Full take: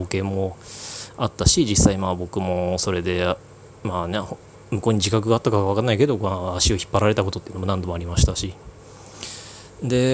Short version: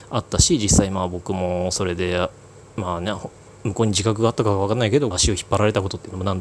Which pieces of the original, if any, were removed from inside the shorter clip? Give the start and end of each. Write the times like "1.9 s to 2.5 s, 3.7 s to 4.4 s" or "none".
6.2 s to 6.5 s